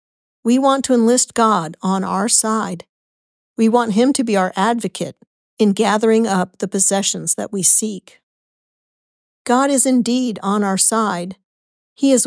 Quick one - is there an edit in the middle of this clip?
no; 0 cuts

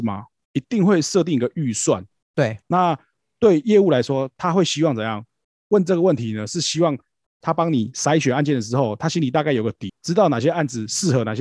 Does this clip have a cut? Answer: yes; 1 cut; at 2.6 s

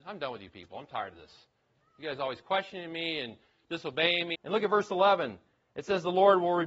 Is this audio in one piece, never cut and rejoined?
no; 1 cut; at 4.3 s

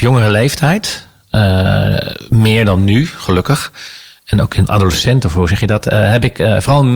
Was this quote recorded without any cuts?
no; 1 cut; at 4.7 s

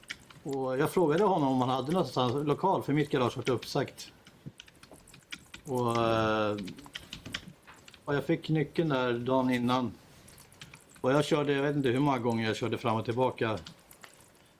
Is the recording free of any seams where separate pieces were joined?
no; 1 cut; at 8.1 s

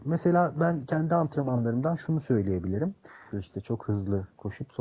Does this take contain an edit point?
yes; 1 cut; at 3.3 s

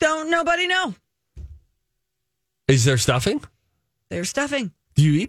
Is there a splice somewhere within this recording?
no; 0 cuts

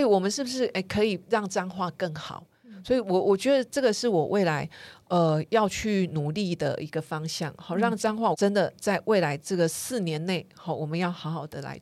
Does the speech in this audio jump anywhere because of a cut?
yes; 1 cut; at 8.3 s

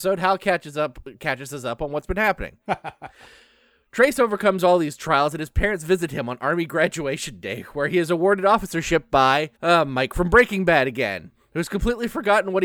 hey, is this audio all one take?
no; 2 cuts; at 2.7 s, 9.6 s

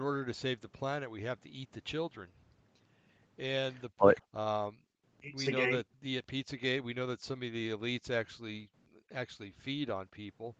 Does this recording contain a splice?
yes; 2 cuts; at 4.2 s, 5.9 s

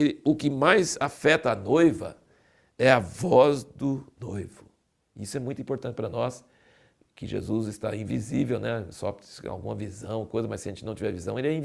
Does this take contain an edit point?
no; 0 cuts

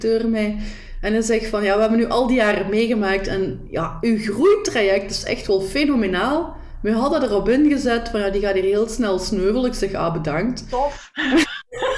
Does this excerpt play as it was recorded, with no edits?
yes; 0 cuts

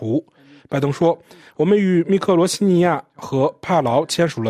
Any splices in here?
no; 0 cuts

